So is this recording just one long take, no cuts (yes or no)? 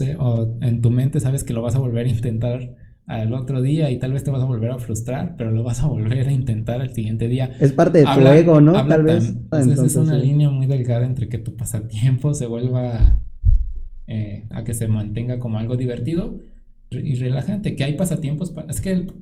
no